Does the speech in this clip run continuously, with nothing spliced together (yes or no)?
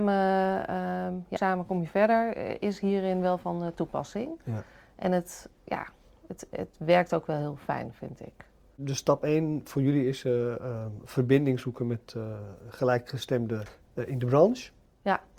no